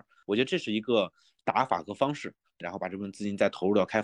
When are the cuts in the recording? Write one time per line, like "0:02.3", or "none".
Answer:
0:02.6